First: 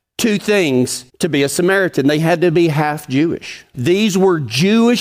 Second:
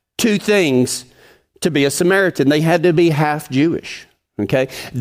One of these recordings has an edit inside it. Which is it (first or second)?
first